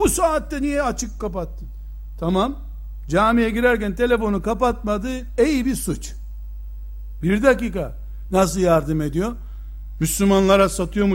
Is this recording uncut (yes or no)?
no